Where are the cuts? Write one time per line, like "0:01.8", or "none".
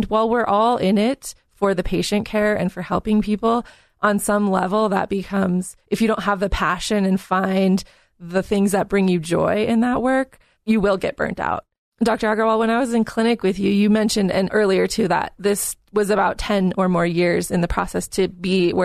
none